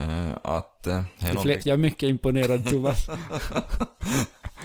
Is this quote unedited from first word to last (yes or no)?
no